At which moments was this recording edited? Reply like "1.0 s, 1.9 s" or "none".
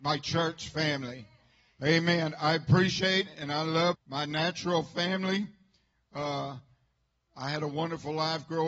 3.9 s